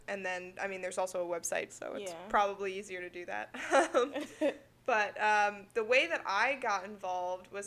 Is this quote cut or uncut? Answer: cut